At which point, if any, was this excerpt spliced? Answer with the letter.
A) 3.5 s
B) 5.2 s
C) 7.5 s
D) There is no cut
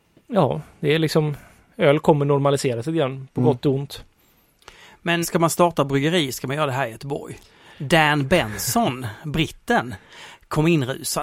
B